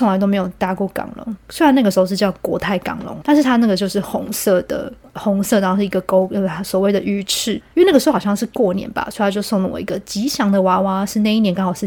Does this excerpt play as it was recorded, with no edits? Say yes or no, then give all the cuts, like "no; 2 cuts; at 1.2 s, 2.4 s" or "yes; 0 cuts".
no; 3 cuts; at 1.4 s, 3.2 s, 7.7 s